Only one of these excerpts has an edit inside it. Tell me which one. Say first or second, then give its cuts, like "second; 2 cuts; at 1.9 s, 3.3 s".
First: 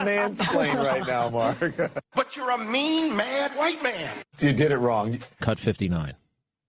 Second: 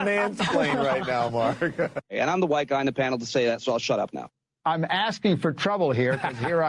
first; 2 cuts; at 2.0 s, 5.4 s